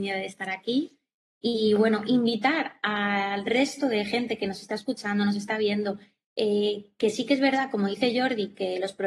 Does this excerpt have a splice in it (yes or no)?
no